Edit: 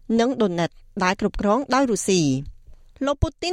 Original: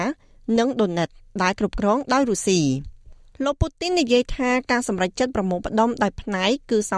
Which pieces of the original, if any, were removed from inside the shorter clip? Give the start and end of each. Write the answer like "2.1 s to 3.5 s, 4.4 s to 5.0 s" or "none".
none